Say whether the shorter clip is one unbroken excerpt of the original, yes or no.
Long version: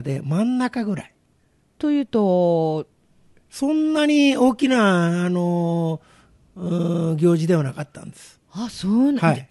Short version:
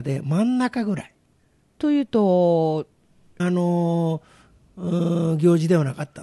no